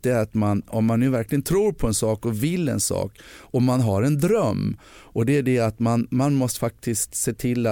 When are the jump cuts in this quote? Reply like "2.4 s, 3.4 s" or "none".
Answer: none